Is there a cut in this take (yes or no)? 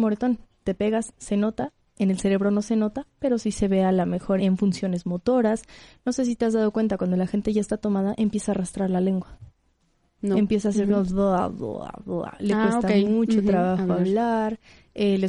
yes